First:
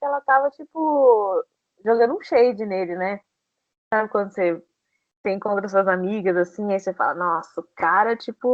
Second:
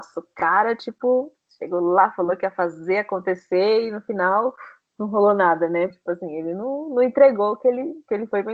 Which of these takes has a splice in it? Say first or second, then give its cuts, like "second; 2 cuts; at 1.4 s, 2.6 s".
second; 1 cut; at 5.9 s